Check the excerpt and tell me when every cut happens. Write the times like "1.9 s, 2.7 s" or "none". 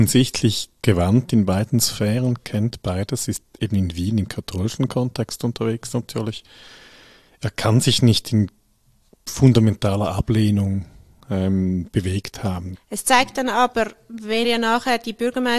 12.7 s, 14.4 s